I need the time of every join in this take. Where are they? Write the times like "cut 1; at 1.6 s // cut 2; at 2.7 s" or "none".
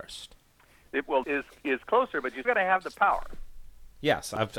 cut 1; at 1.2 s // cut 2; at 2.4 s